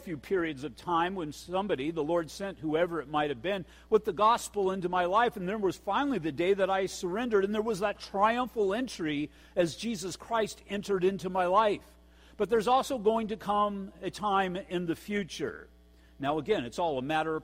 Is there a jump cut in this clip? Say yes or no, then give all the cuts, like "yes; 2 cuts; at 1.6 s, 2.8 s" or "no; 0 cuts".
no; 0 cuts